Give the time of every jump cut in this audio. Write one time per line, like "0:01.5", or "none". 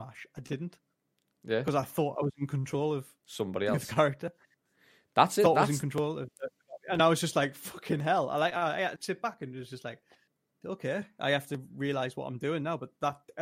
0:09.0
0:10.6